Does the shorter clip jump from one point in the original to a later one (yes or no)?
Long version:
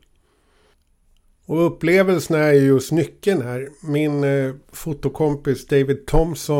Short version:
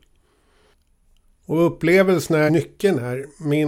yes